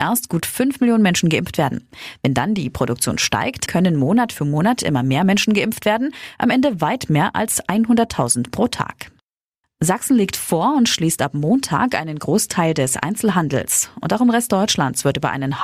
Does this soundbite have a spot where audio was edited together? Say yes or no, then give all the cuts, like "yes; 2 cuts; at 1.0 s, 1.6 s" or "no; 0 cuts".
yes; 2 cuts; at 3.7 s, 9.6 s